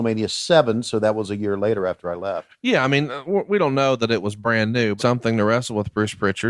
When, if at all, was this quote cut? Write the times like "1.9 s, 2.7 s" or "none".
5.0 s